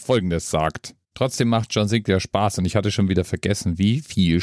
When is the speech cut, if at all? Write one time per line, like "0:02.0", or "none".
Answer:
0:01.0